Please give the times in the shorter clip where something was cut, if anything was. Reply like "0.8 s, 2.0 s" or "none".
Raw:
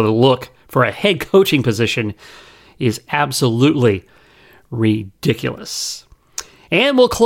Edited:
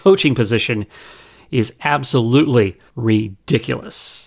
2.9 s

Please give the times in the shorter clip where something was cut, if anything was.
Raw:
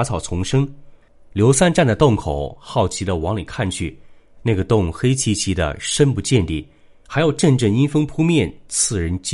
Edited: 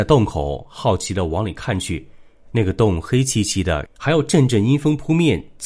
3.9 s

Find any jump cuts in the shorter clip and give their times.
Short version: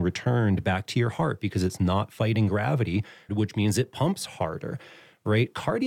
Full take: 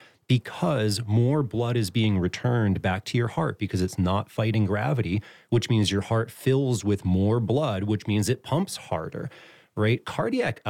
3.3 s

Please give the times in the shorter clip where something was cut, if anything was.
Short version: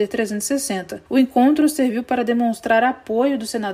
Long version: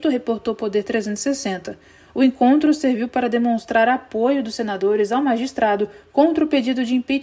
1.1 s

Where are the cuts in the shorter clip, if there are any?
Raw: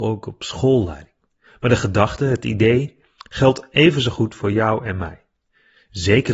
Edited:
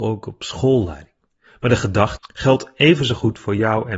2.2 s

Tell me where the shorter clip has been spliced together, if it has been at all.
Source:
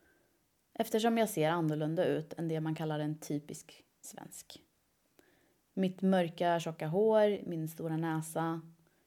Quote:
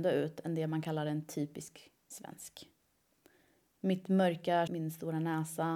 4.7 s

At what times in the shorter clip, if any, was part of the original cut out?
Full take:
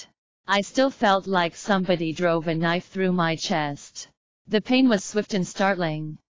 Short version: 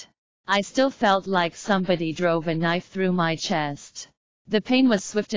none

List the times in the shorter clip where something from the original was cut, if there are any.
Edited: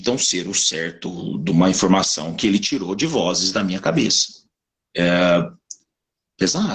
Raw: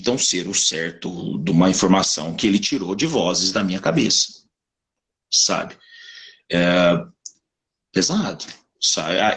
4.9 s

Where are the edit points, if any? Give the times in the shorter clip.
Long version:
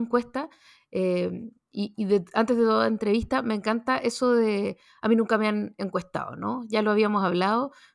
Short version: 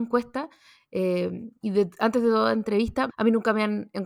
1.6 s, 3.1 s

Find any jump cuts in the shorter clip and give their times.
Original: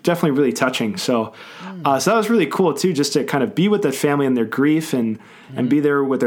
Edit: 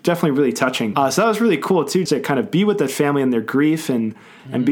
0.9 s, 2.1 s

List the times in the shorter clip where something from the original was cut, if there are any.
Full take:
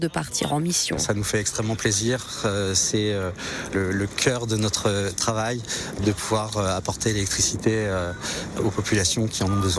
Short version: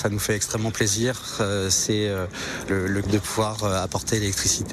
3.0 s

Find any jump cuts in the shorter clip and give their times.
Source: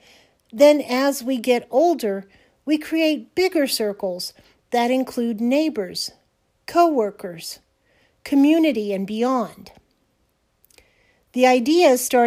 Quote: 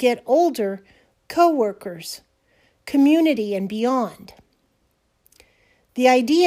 1.1 s

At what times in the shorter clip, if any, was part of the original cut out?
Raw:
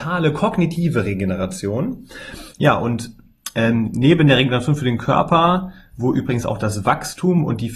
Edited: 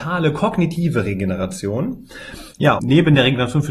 2.8 s

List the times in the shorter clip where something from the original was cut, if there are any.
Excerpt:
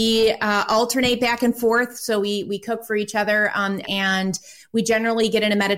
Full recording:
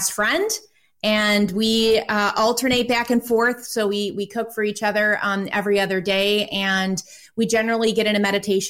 3.8 s

